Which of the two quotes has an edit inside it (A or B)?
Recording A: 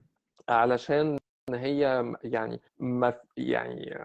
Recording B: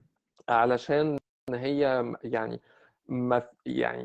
A